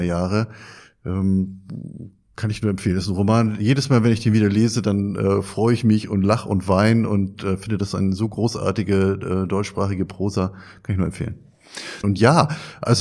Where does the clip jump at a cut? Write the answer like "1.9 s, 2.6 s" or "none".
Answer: 12.0 s